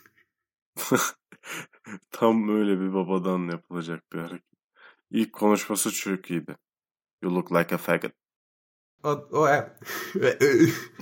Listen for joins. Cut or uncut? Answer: cut